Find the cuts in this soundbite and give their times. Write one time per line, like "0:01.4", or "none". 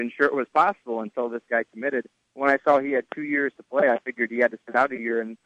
none